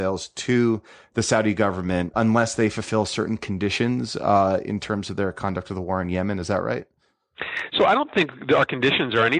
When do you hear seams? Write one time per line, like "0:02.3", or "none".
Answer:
0:02.1